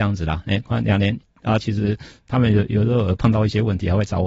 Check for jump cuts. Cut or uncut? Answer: cut